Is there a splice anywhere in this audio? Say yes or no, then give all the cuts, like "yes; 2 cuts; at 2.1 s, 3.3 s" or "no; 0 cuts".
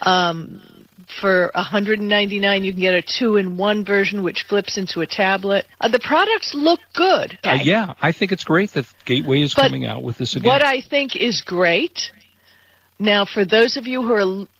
yes; 2 cuts; at 5.7 s, 7.4 s